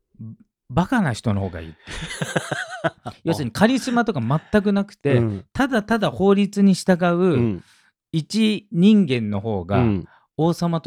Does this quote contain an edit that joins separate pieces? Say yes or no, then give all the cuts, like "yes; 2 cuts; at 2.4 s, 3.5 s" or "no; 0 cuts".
no; 0 cuts